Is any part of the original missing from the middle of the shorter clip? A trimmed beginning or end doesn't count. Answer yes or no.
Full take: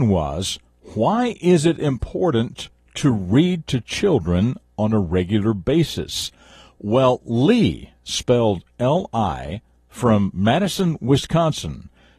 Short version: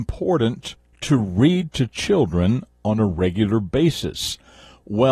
no